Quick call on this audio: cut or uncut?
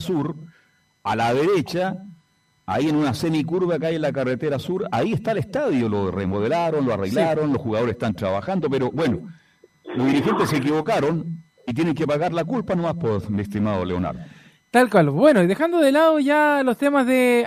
uncut